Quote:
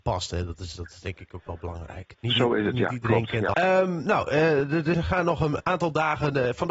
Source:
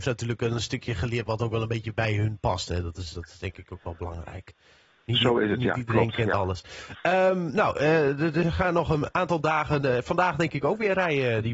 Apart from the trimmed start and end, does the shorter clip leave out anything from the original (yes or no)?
yes